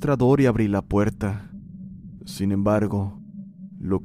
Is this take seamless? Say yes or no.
no